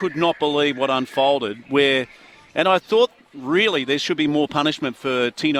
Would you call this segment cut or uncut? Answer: uncut